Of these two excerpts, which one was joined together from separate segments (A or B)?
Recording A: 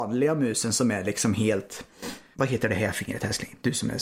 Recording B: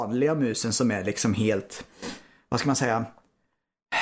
A